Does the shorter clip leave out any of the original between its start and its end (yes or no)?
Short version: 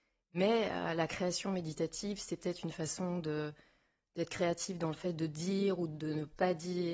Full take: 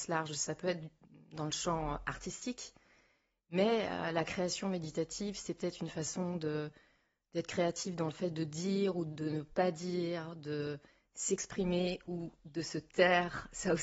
no